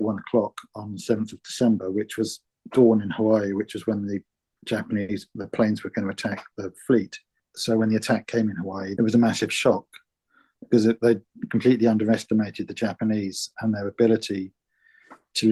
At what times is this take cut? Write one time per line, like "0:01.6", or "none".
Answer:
0:07.4